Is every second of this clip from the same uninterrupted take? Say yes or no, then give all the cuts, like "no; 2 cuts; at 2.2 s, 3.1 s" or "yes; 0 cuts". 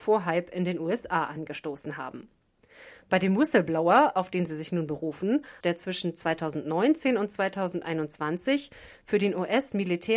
no; 1 cut; at 5.6 s